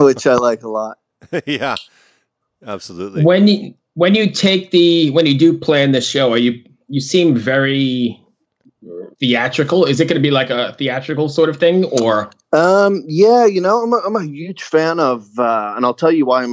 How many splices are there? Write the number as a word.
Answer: one